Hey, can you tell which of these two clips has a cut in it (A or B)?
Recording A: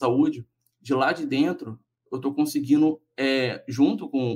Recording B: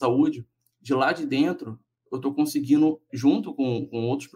B